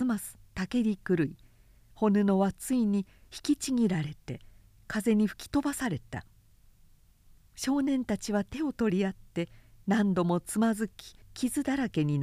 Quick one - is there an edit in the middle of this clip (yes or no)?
yes